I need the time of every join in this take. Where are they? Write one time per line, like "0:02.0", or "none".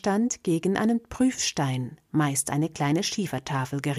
none